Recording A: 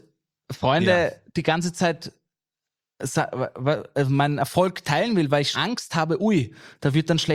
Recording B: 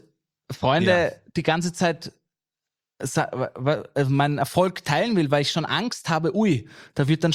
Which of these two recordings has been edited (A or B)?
A